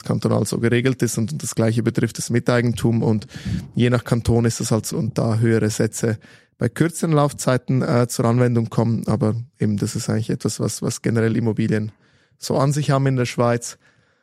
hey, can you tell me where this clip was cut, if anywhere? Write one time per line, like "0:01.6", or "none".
0:04.9